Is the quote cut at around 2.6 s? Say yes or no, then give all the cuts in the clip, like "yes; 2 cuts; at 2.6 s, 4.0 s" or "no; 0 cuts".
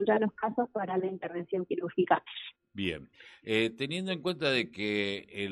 yes; 1 cut; at 2.6 s